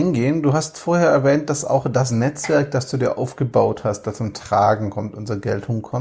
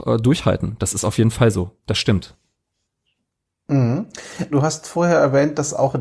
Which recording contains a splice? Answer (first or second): second